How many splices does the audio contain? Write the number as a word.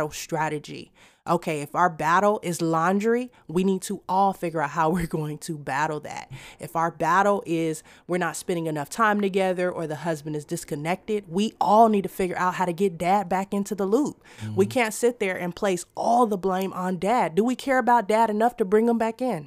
zero